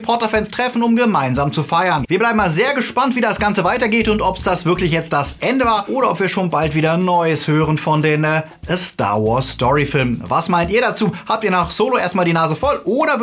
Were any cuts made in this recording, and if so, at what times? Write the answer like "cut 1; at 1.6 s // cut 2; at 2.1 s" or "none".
cut 1; at 2.0 s